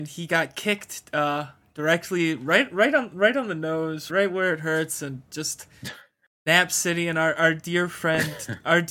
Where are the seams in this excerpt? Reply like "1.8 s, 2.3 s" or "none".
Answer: 4.1 s

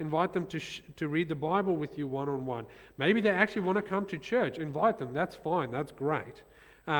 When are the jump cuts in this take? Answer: none

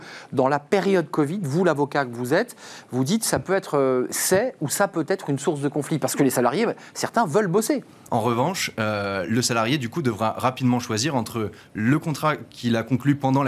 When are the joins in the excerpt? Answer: 8.1 s

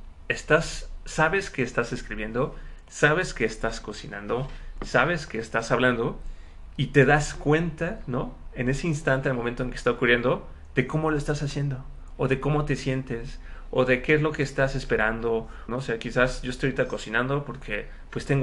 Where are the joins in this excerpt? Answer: 15.7 s

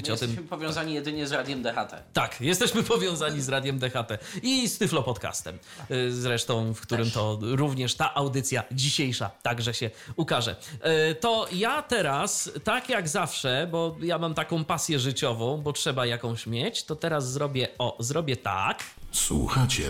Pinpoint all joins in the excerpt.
none

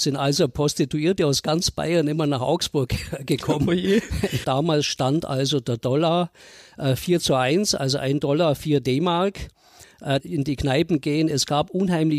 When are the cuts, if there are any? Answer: 4.4 s, 10.2 s

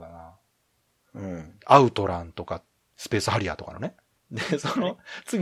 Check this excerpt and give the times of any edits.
1.0 s, 4.2 s

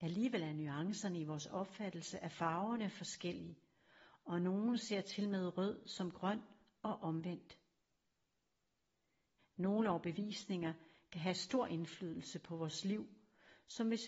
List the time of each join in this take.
9.4 s

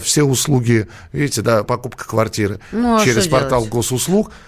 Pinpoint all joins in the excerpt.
1.7 s

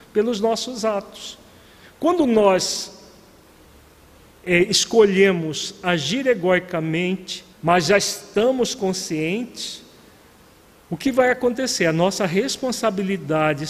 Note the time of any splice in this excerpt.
7.5 s

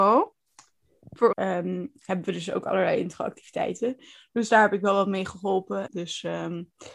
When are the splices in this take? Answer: 1.3 s, 5.9 s

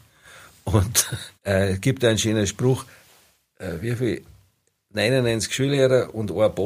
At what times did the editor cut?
1.3 s

